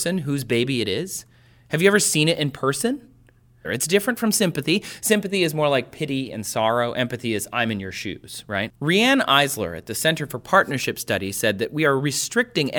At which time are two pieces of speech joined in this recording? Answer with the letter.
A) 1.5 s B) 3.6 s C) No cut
B